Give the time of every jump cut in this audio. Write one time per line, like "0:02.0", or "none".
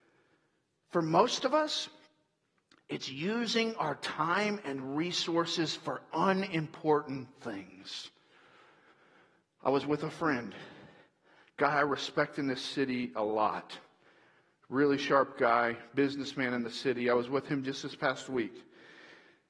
none